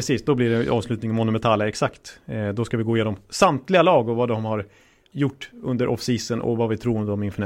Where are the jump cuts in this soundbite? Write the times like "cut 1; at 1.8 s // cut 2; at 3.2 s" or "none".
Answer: none